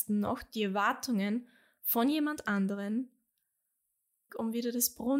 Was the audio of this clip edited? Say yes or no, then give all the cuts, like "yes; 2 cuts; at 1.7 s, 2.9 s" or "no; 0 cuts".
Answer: yes; 1 cut; at 4.3 s